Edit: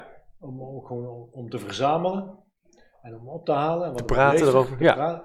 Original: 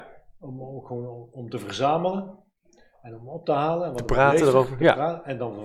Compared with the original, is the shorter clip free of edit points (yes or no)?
yes